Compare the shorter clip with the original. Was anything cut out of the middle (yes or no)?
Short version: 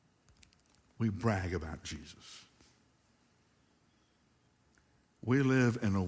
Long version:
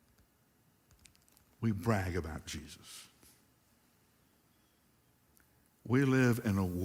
no